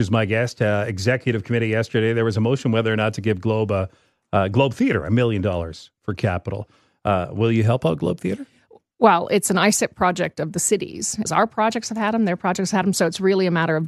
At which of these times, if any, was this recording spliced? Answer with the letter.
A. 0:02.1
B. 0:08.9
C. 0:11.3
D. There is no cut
C